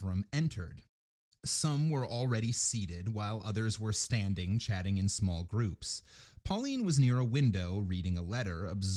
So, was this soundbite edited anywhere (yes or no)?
no